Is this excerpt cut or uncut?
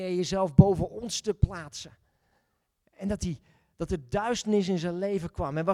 uncut